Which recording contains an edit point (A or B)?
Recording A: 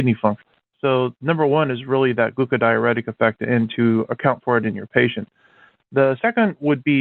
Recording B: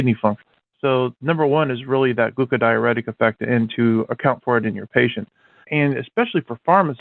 B